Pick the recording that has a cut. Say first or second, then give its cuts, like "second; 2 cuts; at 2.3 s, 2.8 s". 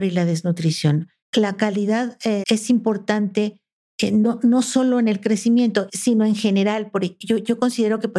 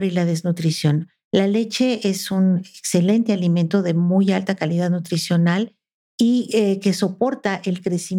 first; 2 cuts; at 1.2 s, 2.4 s